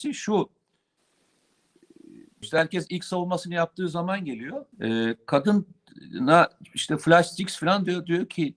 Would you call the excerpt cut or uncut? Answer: cut